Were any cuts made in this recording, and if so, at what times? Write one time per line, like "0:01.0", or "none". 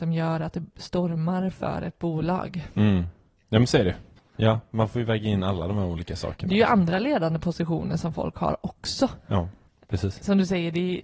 0:04.2